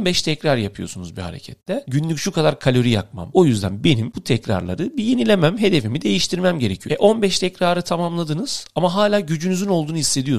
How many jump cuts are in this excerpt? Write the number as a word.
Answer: three